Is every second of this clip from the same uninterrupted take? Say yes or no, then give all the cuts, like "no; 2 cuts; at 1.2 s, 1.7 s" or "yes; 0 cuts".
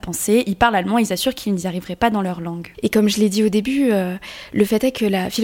no; 1 cut; at 2.7 s